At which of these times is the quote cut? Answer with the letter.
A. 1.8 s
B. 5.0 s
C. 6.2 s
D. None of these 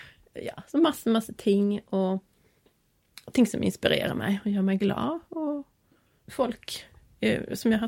C